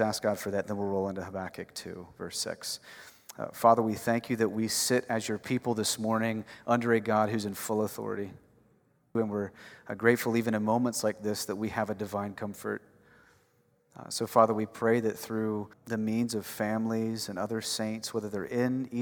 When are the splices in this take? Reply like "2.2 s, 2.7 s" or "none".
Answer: 9.1 s, 15.7 s